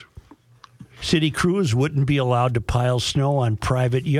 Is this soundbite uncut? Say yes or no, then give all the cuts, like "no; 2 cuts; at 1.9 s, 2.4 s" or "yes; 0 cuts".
no; 1 cut; at 0.9 s